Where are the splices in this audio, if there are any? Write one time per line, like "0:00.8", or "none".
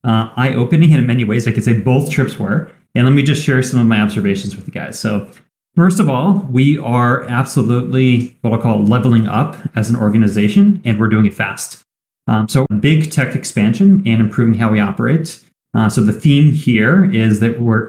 0:12.7